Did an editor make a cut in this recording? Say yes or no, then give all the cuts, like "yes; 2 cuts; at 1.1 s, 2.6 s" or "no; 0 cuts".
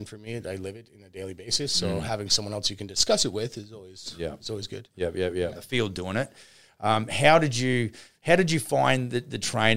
yes; 1 cut; at 5.5 s